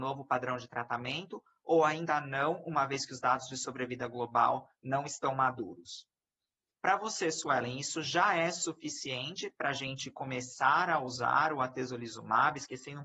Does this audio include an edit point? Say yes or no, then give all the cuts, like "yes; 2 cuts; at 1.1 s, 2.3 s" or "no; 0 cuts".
yes; 1 cut; at 6.7 s